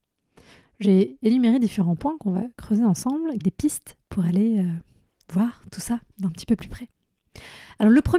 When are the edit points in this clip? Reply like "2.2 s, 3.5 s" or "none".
3.4 s